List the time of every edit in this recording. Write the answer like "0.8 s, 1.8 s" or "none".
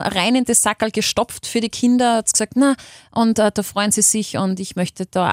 none